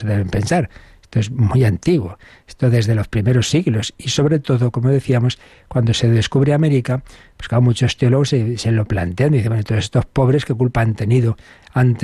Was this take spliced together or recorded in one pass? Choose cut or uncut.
uncut